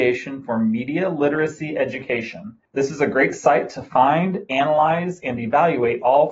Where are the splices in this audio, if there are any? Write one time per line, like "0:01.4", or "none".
0:02.7